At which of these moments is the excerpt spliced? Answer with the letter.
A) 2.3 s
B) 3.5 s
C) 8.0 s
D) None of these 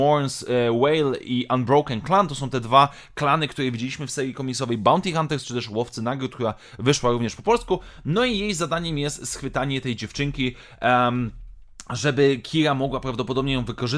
D